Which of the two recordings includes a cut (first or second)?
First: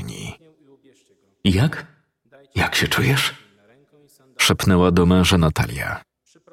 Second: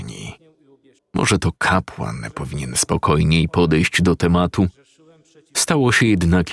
second